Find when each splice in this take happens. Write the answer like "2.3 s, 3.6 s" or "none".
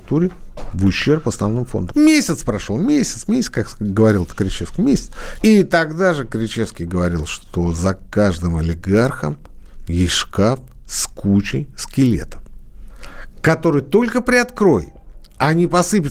1.9 s, 5.4 s